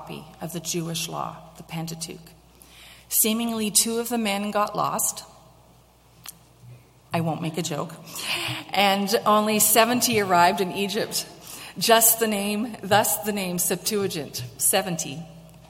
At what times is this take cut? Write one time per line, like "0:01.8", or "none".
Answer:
none